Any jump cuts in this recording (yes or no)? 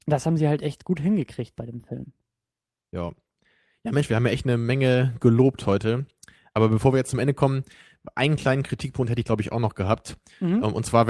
no